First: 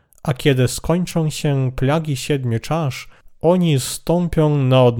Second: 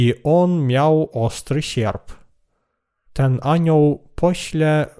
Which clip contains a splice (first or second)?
second